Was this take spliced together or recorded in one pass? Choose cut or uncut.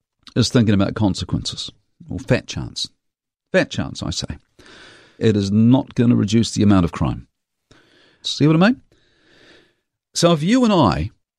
cut